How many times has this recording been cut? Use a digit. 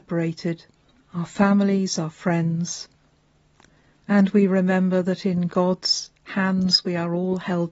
1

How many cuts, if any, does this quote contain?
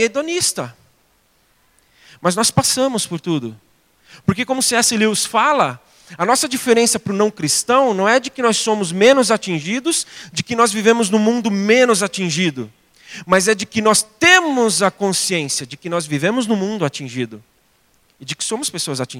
0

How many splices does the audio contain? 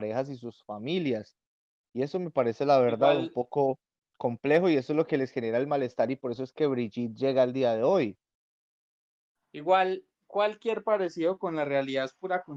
0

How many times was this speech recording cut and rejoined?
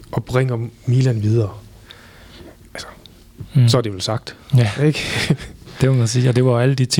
0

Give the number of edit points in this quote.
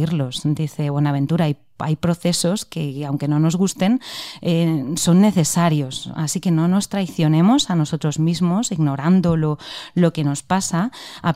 0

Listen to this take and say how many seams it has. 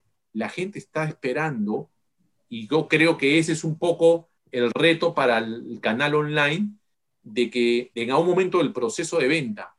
2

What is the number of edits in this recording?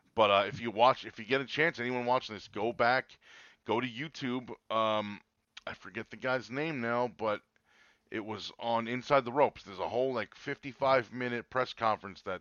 0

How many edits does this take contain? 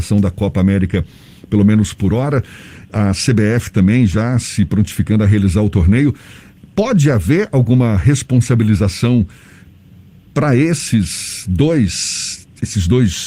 0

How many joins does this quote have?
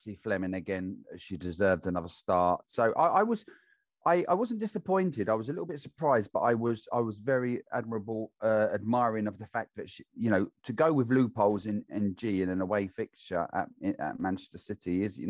0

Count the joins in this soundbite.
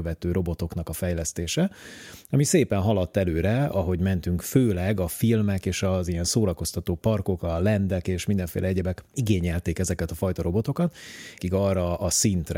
1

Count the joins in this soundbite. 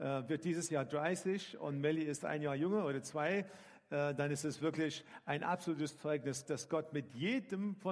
1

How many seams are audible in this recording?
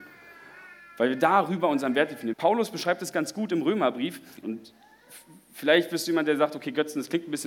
2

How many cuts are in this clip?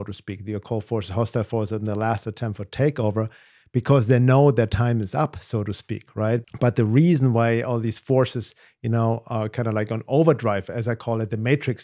1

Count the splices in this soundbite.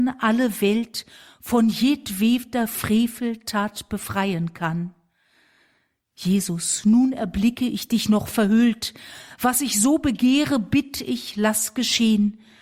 0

